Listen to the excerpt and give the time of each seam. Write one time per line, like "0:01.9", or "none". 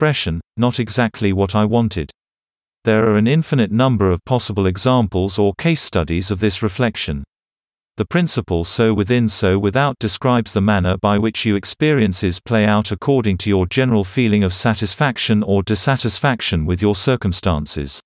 0:02.7